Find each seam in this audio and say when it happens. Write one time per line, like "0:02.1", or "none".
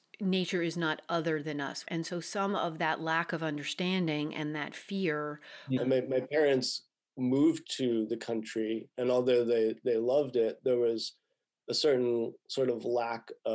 0:01.8
0:05.8